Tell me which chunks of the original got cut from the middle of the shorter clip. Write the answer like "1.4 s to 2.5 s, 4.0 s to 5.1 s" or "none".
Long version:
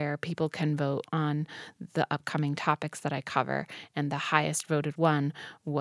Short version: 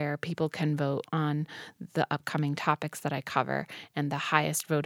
none